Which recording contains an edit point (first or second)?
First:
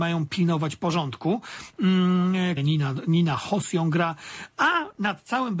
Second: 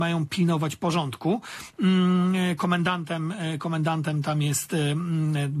first